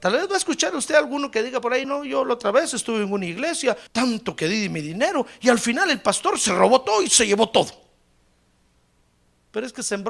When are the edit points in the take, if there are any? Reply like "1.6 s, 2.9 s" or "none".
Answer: 1.8 s, 3.9 s